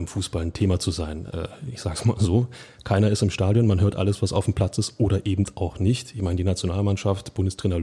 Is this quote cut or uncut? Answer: uncut